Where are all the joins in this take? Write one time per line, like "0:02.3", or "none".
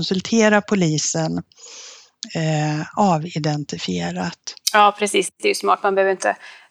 none